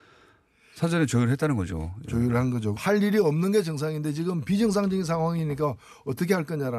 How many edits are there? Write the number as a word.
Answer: one